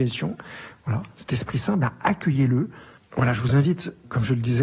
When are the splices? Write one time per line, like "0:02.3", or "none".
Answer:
0:03.0